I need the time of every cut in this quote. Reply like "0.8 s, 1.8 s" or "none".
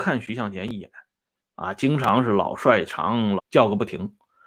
3.4 s